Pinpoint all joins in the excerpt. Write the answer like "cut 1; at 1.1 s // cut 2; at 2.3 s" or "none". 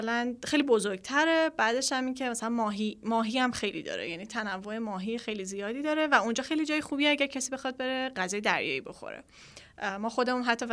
none